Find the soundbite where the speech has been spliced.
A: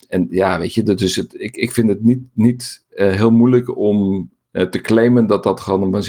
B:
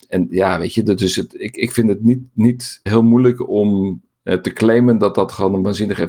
B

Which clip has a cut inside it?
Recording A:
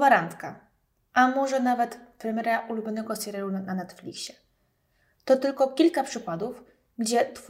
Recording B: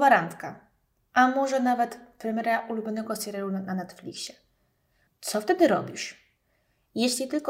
B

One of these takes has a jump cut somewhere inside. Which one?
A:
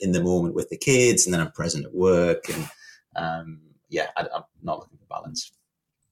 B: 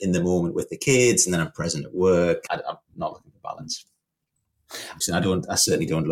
B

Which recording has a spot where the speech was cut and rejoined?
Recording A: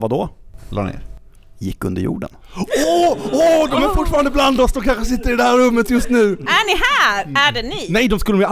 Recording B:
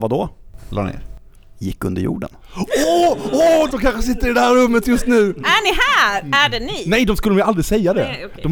B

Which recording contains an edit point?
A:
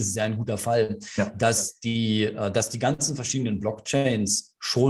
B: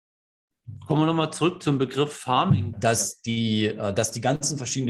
B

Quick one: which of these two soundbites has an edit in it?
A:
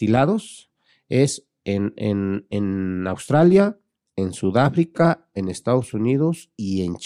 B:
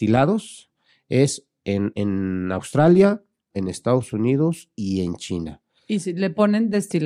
B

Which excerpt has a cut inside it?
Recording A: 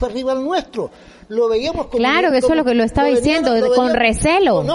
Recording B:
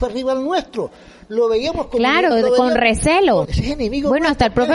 B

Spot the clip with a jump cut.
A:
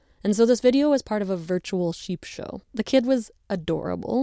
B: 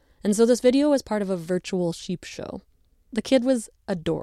A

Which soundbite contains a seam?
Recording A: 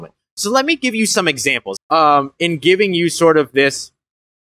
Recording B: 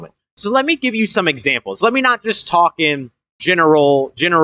A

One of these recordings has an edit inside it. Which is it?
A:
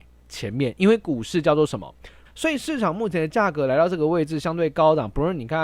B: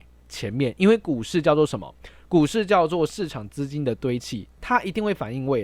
A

